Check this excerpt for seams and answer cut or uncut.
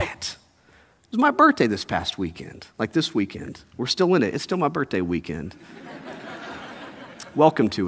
uncut